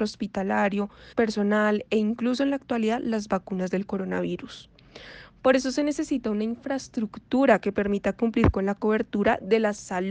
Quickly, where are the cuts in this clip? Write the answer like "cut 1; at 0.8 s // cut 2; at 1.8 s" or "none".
cut 1; at 1.1 s